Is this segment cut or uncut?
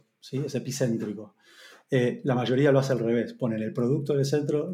uncut